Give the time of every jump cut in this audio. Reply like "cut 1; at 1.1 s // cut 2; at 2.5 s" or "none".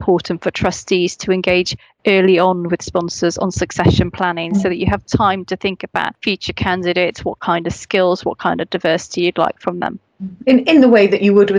none